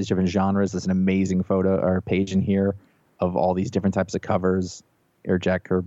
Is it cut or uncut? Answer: uncut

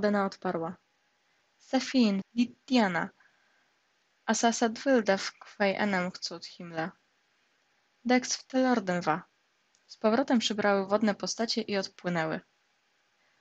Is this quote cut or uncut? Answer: cut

